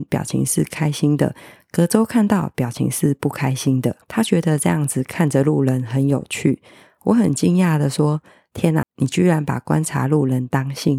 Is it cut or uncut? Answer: cut